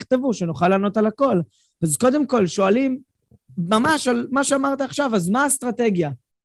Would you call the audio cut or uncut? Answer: uncut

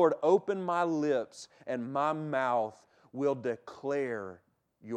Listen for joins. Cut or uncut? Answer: uncut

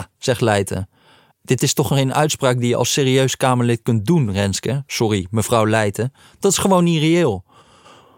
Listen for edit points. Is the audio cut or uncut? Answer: cut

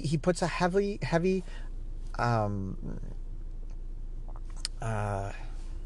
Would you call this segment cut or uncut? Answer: uncut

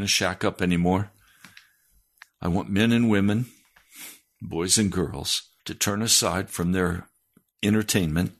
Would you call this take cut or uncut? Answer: cut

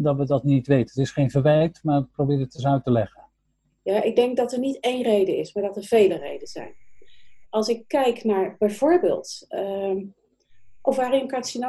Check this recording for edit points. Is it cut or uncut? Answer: cut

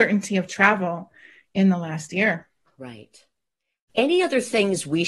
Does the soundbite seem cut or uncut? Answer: uncut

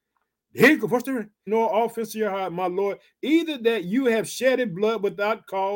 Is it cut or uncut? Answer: cut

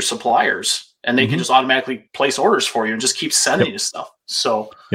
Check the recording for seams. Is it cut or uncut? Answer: uncut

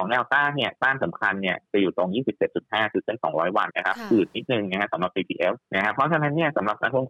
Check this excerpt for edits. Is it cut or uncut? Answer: cut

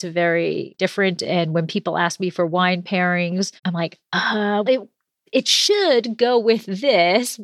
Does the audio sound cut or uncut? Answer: cut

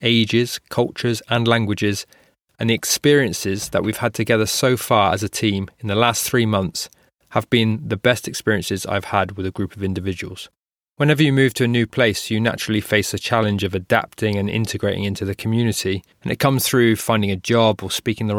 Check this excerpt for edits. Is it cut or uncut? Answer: cut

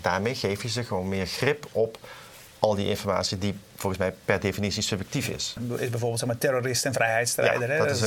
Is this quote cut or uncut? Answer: cut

